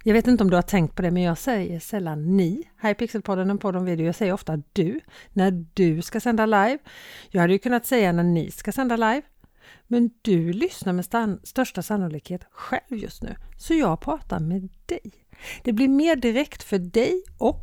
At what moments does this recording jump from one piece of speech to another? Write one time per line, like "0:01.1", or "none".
none